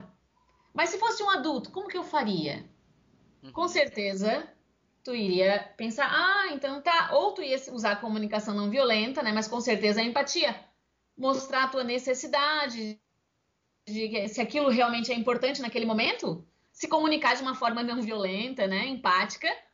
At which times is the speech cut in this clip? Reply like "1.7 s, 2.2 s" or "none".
none